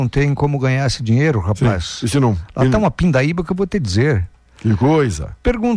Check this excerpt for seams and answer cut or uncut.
uncut